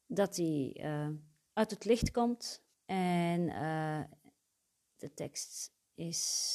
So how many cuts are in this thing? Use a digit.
1